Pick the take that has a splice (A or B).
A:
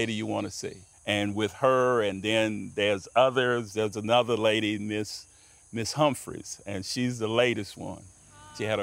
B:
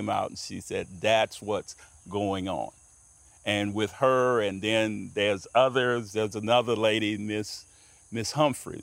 A